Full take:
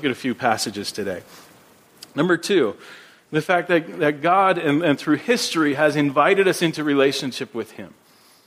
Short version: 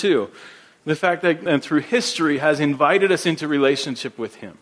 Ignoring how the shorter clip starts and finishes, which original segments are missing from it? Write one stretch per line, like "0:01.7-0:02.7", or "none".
0:03.9-0:04.8